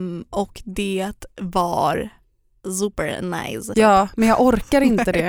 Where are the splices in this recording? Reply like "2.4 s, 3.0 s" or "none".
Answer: 3.7 s